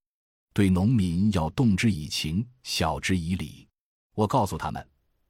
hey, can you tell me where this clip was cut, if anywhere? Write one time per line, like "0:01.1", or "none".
0:04.1